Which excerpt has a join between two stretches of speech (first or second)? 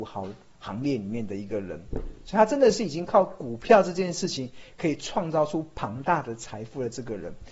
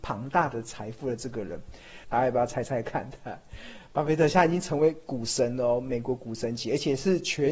second